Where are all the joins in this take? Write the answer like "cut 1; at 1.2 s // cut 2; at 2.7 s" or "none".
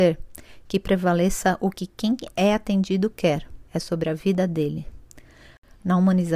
cut 1; at 3.7 s

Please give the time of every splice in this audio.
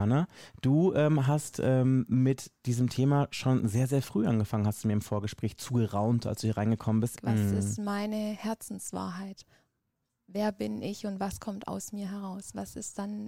cut 1; at 7.1 s

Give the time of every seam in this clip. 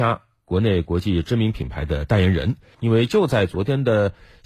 cut 1; at 2.7 s

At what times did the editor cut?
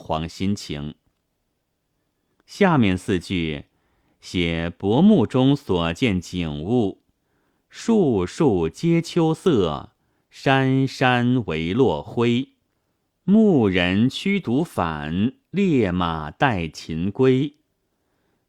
none

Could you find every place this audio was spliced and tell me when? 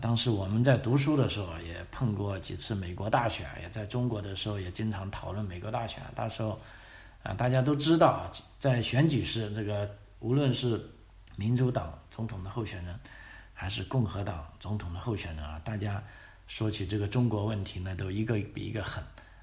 cut 1; at 11.3 s

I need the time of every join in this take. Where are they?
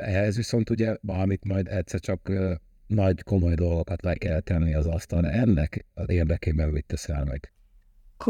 none

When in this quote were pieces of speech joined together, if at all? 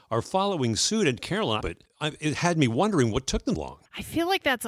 cut 1; at 1.6 s // cut 2; at 3.5 s

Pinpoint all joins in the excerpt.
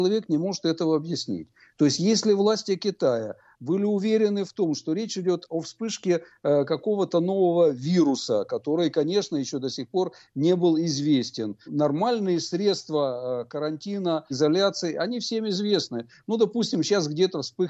cut 1; at 11.7 s // cut 2; at 14.3 s

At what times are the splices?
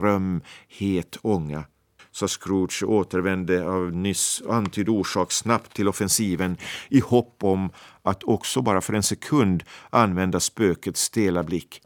cut 1; at 2.0 s

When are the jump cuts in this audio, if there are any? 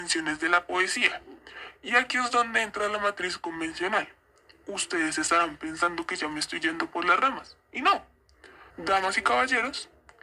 cut 1; at 8.7 s

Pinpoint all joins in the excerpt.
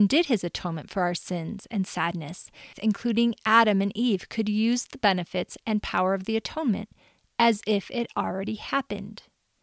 cut 1; at 2.7 s

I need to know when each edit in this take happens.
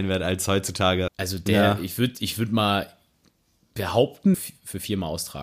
cut 1; at 1.1 s // cut 2; at 4.3 s

